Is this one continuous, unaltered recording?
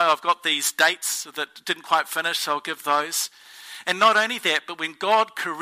yes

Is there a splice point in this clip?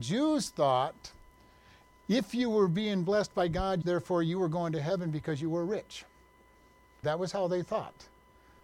yes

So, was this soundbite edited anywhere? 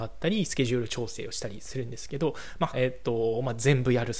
yes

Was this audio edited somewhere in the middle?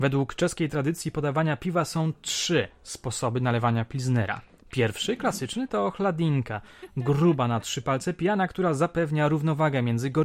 no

